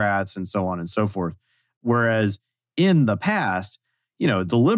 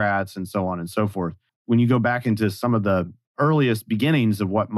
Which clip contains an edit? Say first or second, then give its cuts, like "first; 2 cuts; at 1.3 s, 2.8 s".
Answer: second; 1 cut; at 1.5 s